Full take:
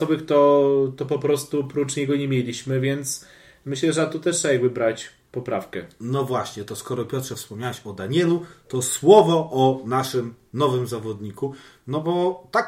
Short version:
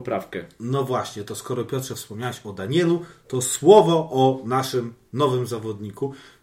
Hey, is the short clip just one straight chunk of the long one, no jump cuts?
yes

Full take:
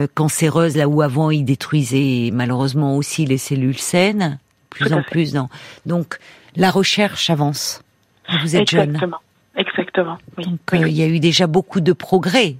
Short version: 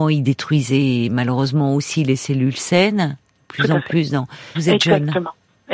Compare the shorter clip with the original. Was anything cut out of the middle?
yes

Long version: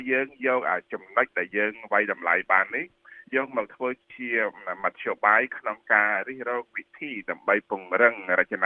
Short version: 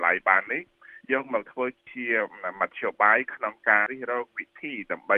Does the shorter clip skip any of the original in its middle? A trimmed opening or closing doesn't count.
yes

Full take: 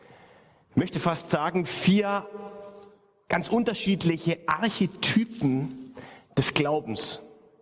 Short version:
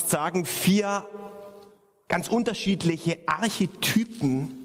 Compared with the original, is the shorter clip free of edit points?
yes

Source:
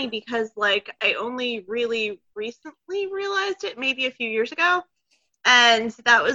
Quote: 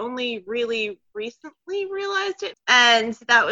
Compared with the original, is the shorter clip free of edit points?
no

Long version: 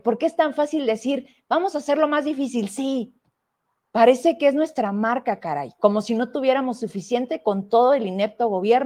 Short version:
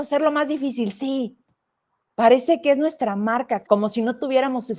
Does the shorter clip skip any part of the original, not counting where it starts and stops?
yes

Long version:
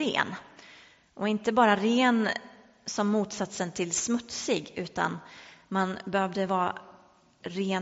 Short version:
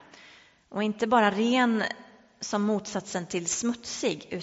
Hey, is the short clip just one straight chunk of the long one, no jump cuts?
yes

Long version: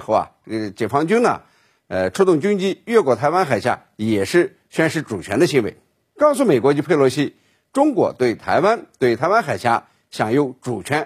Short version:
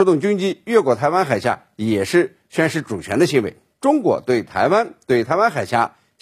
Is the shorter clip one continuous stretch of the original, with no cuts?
no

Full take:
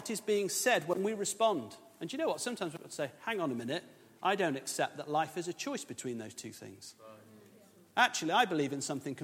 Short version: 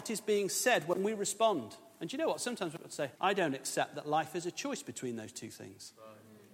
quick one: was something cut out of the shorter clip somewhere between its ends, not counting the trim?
yes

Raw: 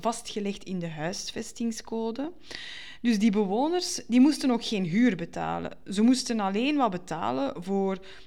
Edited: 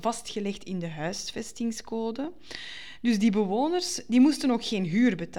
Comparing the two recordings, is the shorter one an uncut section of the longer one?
yes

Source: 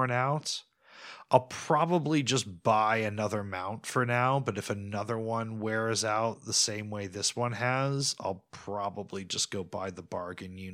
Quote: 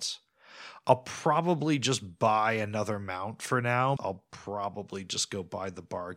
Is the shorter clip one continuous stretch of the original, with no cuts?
no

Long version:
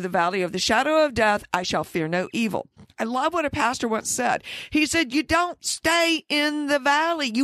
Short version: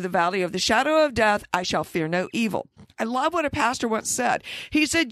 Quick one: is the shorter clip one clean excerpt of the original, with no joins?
yes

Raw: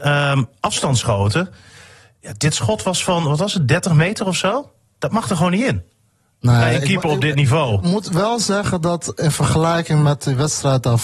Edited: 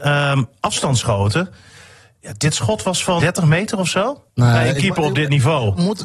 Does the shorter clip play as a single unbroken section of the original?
no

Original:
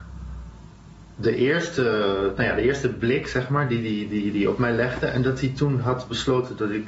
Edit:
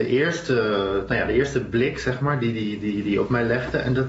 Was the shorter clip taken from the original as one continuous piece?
yes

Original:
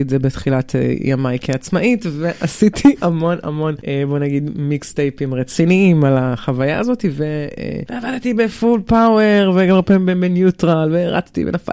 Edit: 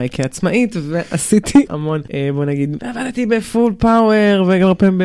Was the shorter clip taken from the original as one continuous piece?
no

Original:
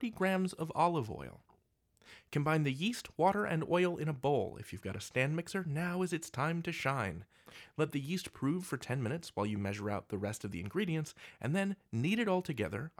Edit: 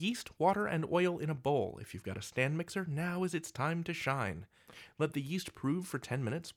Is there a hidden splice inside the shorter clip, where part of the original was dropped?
no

